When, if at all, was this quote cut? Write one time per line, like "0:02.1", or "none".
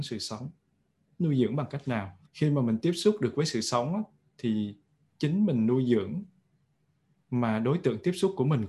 0:02.3